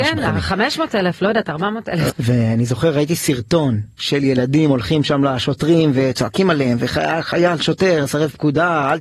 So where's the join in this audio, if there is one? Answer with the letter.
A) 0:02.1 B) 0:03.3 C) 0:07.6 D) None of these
A